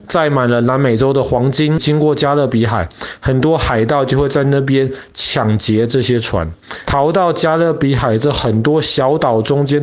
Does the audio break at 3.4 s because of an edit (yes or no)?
no